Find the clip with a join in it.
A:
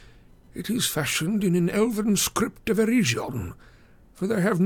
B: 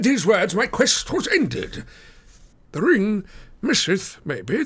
B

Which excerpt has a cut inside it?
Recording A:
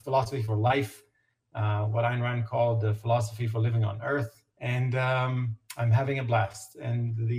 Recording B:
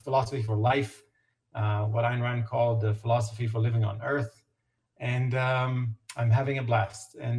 A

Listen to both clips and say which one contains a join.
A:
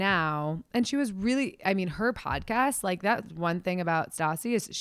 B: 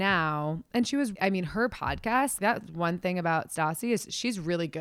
B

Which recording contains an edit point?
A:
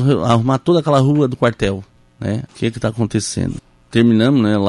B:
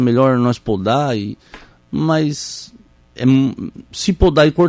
A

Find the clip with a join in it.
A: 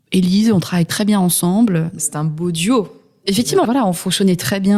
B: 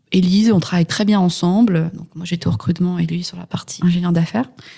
A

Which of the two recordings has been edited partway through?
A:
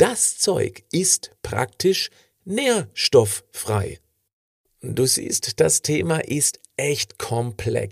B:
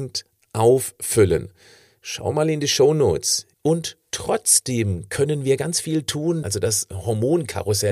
B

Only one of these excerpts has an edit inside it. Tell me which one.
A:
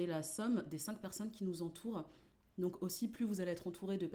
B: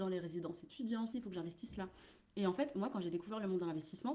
B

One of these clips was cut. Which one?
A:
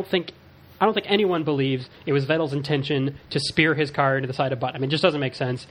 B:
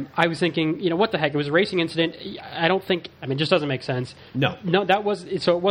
B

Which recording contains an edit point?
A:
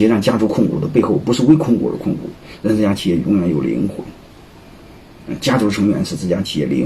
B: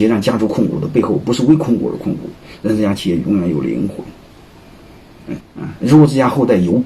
B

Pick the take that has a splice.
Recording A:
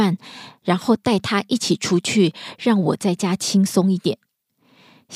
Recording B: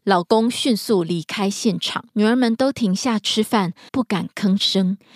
B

